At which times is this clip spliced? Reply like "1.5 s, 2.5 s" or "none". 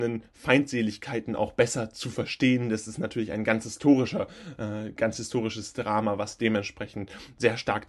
none

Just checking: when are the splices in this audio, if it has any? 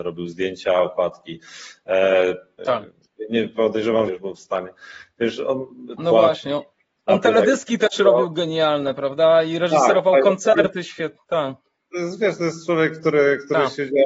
2.6 s, 4.1 s, 6.0 s

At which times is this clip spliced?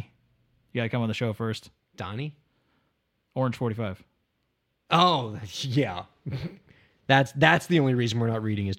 none

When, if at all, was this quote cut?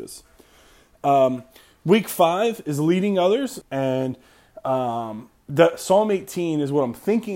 3.6 s

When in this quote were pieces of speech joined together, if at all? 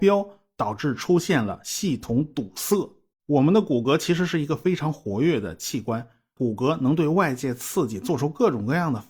3.1 s, 6.4 s

